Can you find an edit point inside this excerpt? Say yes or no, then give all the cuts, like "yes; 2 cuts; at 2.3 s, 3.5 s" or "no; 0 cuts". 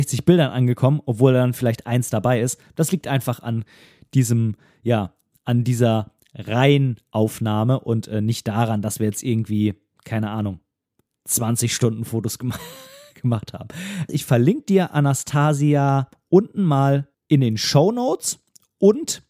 yes; 2 cuts; at 14.1 s, 17.1 s